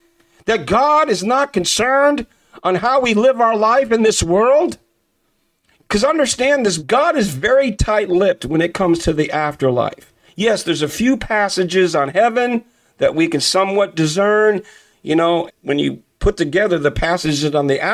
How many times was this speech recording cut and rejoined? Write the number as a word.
two